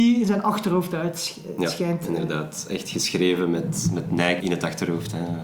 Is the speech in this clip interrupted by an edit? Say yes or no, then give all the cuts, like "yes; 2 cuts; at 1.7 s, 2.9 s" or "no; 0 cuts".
no; 0 cuts